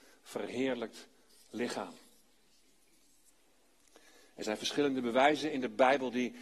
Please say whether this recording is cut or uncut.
uncut